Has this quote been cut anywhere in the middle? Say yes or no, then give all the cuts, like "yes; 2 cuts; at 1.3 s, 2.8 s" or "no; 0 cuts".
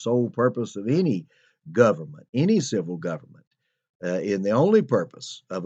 no; 0 cuts